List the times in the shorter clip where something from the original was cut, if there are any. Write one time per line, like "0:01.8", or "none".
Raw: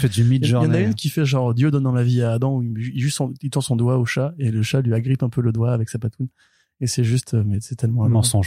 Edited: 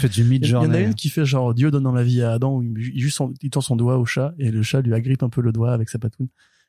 none